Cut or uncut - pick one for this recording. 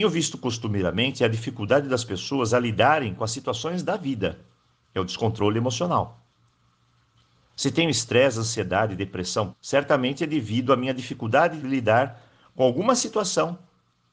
cut